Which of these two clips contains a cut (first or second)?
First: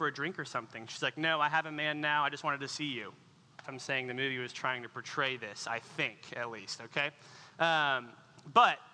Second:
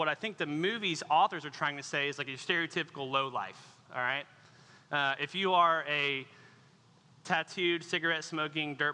first